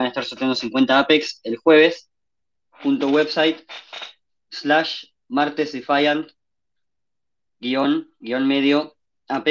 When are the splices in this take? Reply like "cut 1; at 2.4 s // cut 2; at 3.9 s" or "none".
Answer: cut 1; at 2.7 s